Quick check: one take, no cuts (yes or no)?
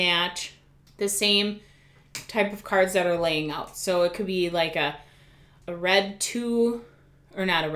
yes